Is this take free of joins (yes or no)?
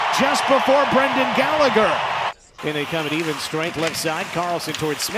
no